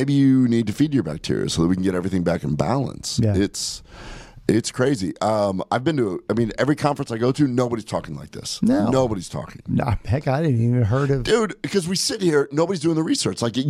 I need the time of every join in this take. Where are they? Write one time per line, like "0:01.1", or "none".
none